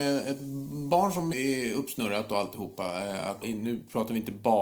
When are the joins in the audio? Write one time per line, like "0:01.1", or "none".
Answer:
0:01.3
0:03.4